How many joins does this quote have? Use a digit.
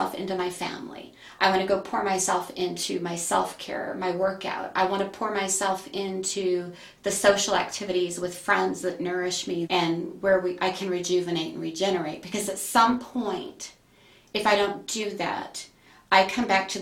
1